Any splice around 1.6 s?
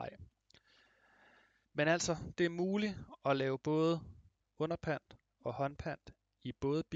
yes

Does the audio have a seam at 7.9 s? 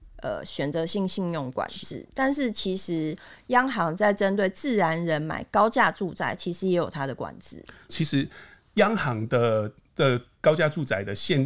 yes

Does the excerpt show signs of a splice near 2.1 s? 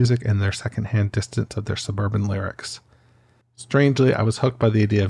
no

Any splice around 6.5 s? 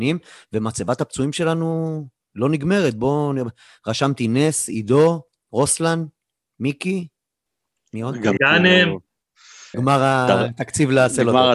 no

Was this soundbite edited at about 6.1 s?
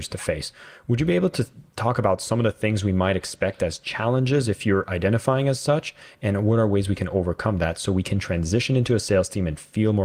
no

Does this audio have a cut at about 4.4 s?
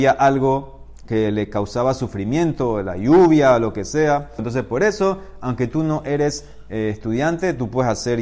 yes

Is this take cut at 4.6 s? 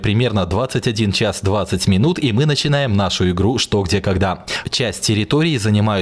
yes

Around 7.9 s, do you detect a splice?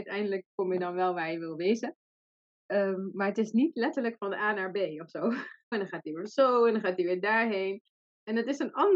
no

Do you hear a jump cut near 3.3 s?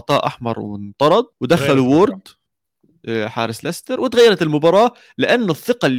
no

